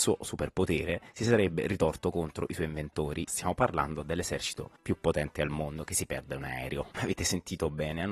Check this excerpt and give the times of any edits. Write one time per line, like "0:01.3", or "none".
0:03.3
0:06.9